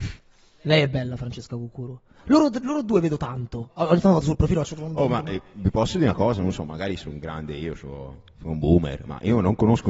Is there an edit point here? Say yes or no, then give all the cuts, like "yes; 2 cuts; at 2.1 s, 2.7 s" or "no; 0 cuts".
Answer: no; 0 cuts